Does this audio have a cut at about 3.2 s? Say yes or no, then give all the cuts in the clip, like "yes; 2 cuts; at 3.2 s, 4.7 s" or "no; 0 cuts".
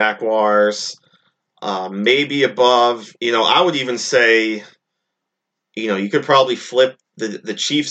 yes; 1 cut; at 3.2 s